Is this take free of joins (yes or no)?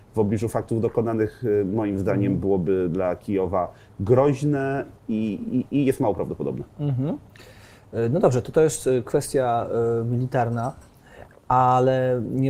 yes